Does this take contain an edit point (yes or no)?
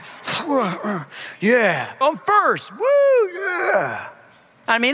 yes